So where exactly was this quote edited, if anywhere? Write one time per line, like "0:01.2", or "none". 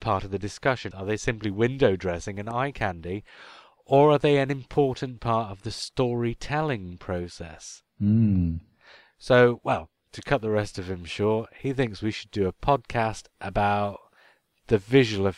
0:00.9
0:07.9